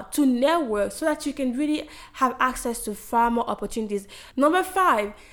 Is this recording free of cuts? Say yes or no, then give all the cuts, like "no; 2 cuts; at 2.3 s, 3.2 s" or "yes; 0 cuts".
no; 1 cut; at 4.3 s